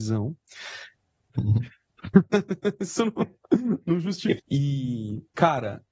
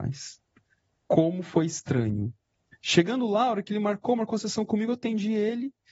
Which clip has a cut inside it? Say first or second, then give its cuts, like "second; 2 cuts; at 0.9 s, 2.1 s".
first; 2 cuts; at 1.3 s, 4.4 s